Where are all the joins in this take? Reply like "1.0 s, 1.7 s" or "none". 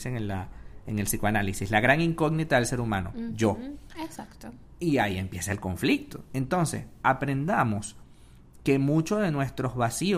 3.9 s